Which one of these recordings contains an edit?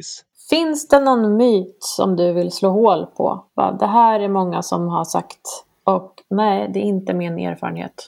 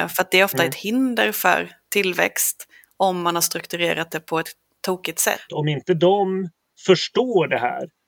second; 1 cut; at 5.5 s

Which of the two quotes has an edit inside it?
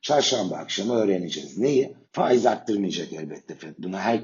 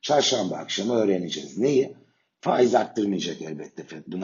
first; 1 cut; at 2.0 s

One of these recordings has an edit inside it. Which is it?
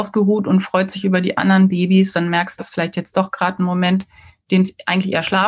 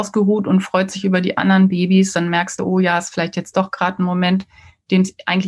first; 1 cut; at 2.6 s

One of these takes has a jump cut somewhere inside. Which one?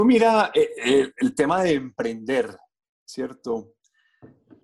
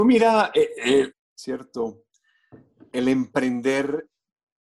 second; 1 cut; at 1.1 s

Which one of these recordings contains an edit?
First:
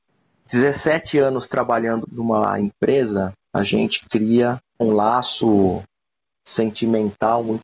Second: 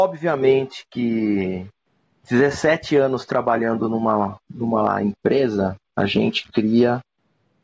first; 2 cuts; at 2.0 s, 4.8 s

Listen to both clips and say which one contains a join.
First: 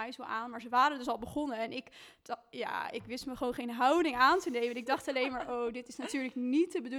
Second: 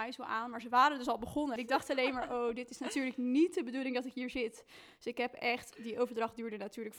second; 1 cut; at 1.6 s

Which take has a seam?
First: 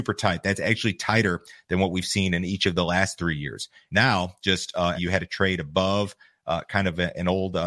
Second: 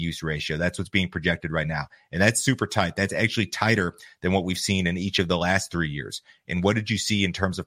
first; 2 cuts; at 3.9 s, 4.9 s

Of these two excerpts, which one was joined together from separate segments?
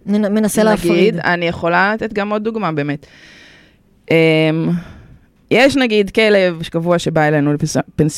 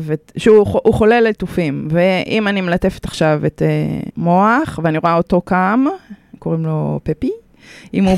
second; 1 cut; at 4.1 s

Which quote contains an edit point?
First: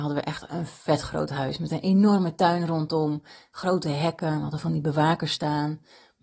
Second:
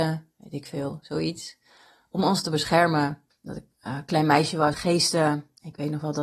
second; 2 cuts; at 3.3 s, 4.7 s

